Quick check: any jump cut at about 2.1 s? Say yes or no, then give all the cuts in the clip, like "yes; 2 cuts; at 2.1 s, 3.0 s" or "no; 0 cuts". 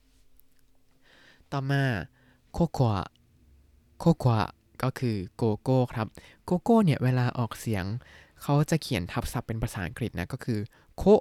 no; 0 cuts